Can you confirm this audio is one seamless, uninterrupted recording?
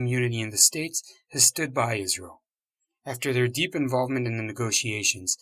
yes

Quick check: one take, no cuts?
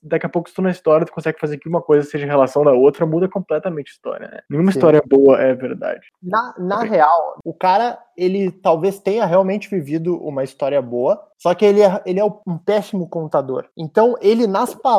yes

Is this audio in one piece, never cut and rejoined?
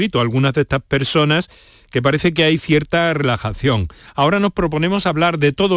yes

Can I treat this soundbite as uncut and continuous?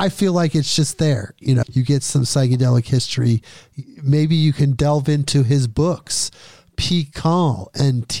no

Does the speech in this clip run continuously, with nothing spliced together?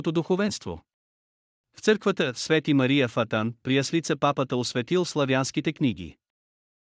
yes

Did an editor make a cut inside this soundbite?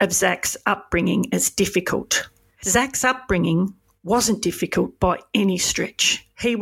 no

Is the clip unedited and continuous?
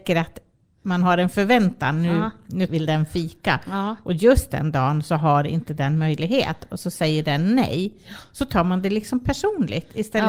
no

